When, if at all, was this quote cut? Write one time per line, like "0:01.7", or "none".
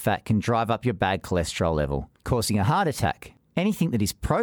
0:02.2